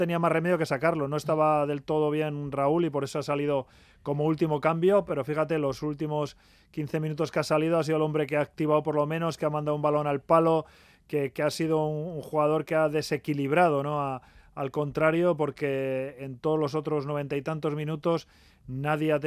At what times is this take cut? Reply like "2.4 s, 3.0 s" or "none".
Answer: none